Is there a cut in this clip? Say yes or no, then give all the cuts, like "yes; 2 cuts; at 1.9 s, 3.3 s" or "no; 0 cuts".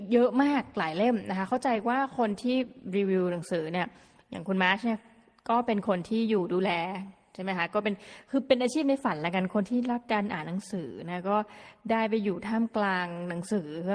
no; 0 cuts